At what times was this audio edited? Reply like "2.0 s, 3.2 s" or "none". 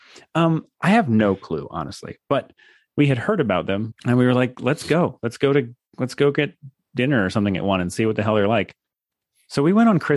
3.9 s, 5.8 s